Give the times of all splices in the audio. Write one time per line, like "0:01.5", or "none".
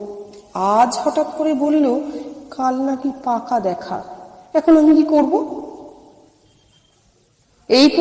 none